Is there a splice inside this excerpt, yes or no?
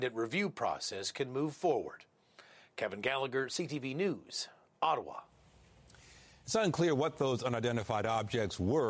no